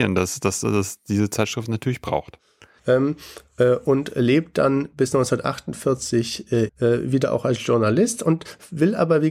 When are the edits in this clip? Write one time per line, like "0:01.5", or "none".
0:02.8
0:06.7